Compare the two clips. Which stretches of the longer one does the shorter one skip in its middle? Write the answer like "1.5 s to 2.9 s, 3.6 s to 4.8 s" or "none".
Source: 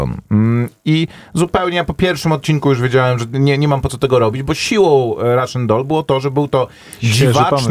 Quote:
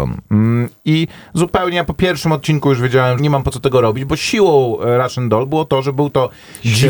3.2 s to 3.6 s